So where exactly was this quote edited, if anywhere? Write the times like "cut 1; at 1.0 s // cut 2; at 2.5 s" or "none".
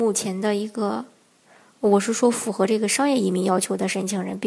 none